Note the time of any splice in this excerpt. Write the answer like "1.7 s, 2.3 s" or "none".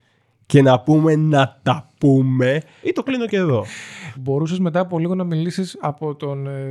2.8 s, 4.1 s